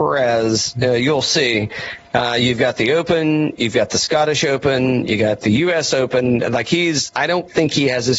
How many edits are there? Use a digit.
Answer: 0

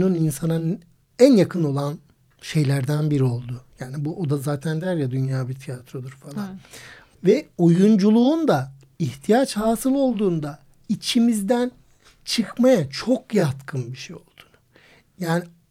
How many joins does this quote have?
1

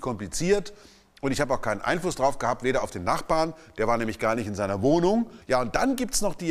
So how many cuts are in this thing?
1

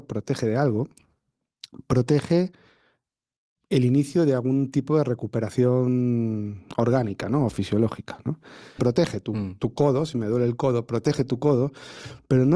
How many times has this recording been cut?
1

